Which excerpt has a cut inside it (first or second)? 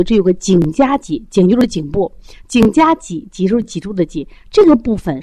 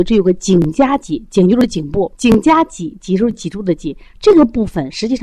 second